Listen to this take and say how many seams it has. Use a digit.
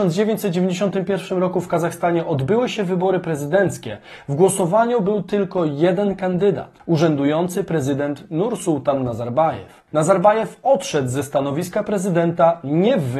0